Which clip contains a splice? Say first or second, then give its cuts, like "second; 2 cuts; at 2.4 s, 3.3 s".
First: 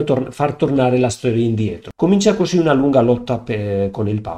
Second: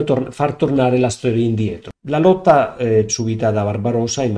second; 2 cuts; at 1.9 s, 3.1 s